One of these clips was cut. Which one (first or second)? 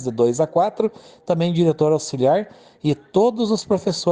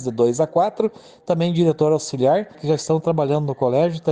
second